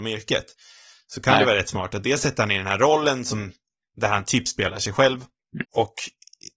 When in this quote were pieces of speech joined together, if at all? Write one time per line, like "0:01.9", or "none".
0:05.6